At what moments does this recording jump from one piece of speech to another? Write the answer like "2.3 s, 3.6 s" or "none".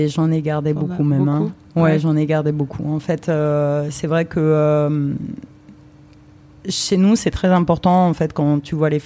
none